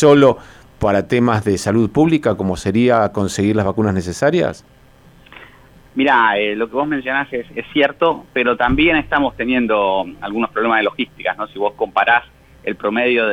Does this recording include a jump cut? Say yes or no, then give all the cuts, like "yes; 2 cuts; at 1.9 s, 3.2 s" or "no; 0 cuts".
no; 0 cuts